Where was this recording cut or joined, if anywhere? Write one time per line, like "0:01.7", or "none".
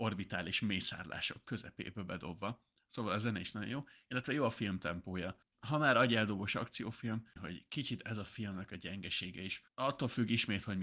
0:05.4
0:07.4